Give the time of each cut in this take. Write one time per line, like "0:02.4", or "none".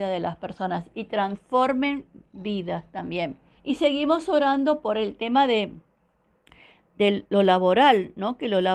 0:03.6